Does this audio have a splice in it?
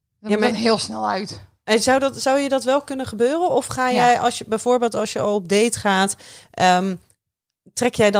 no; 0 cuts

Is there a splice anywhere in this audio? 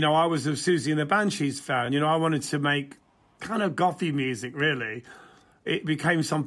no; 0 cuts

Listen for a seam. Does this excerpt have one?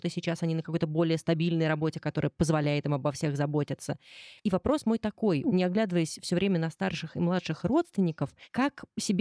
yes; 2 cuts; at 4.4 s, 5.4 s

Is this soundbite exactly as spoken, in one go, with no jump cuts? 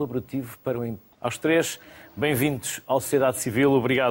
no; 1 cut; at 1.1 s

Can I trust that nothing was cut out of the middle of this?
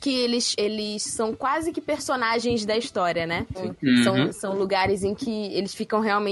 no; 1 cut; at 3.5 s

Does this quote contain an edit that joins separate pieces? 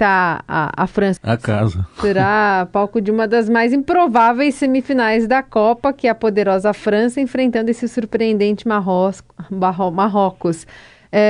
yes; 1 cut; at 1.2 s

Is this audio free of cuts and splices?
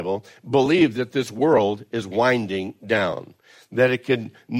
yes; 0 cuts

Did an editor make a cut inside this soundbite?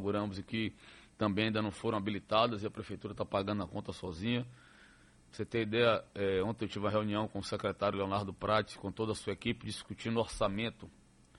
no; 0 cuts

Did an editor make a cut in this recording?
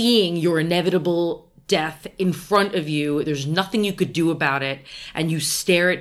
no; 0 cuts

